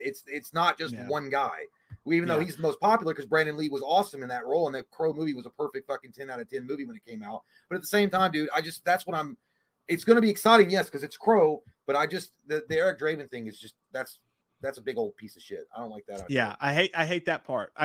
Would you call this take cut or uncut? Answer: uncut